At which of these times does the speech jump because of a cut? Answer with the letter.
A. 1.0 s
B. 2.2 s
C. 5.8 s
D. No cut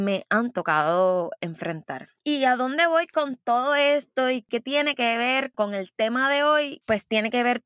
B